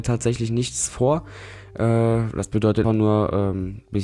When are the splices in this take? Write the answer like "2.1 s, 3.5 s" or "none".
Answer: 2.8 s